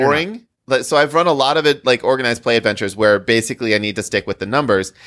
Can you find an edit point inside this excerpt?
no; 0 cuts

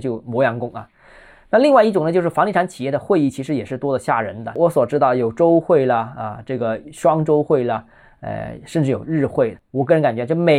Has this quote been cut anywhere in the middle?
yes; 1 cut; at 9.5 s

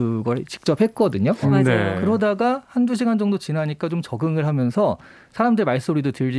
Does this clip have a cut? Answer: yes; 1 cut; at 1.4 s

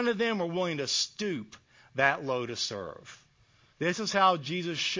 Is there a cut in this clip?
yes; 1 cut; at 3.7 s

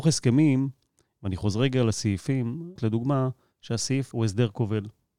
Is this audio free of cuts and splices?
no; 2 cuts; at 2.8 s, 4.1 s

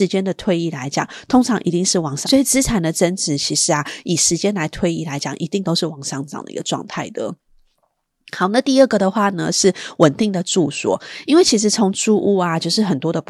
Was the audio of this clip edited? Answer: yes; 1 cut; at 2.2 s

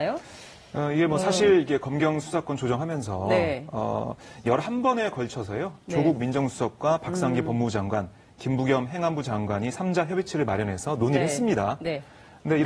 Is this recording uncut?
yes; 0 cuts

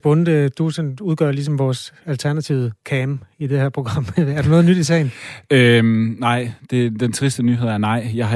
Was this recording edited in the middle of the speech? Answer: no; 0 cuts

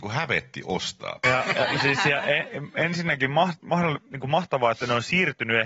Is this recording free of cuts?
no; 1 cut; at 1.2 s

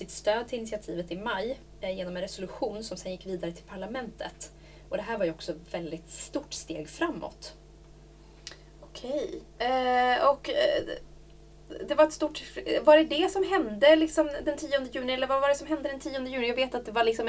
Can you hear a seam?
no; 0 cuts

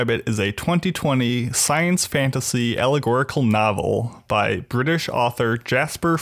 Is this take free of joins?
yes; 0 cuts

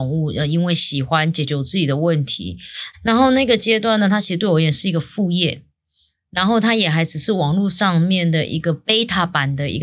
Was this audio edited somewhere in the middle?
no; 0 cuts

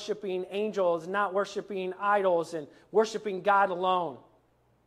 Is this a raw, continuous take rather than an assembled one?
yes; 0 cuts

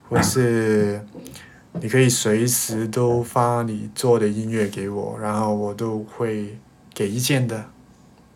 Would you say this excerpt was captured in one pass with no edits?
yes; 0 cuts

